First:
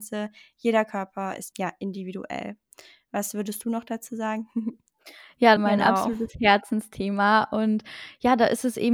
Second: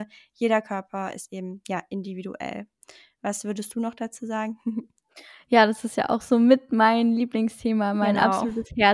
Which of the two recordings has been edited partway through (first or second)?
first